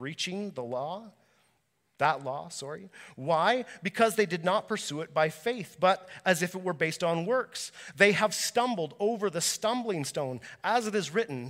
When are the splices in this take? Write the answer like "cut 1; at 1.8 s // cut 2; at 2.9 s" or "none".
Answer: none